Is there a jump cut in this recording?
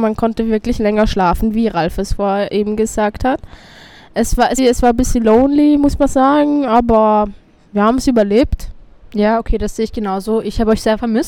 yes; 1 cut; at 4.6 s

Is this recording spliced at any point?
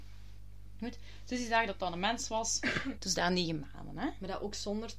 yes; 1 cut; at 3.0 s

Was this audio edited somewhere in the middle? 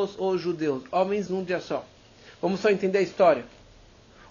yes; 1 cut; at 1.3 s

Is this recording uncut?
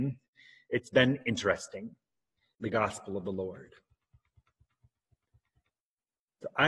no; 1 cut; at 2.5 s

